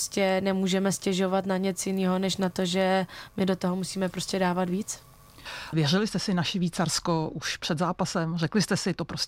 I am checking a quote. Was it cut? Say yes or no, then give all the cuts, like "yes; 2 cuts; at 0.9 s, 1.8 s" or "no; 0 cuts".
yes; 1 cut; at 5.7 s